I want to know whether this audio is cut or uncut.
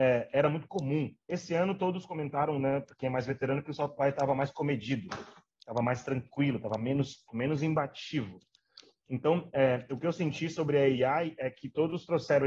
cut